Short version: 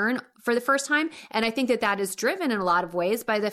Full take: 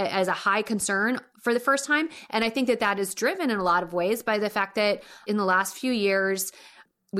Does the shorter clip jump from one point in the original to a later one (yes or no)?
no